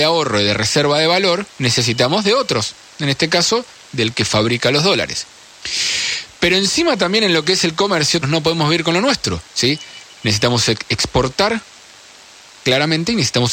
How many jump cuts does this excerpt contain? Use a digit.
3